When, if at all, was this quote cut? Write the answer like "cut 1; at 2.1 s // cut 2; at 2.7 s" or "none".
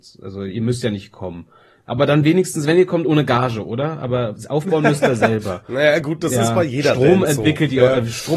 none